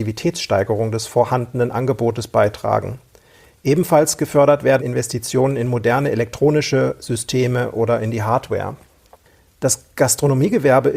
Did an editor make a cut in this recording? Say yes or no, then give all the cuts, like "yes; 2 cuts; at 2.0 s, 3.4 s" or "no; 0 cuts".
yes; 1 cut; at 4.8 s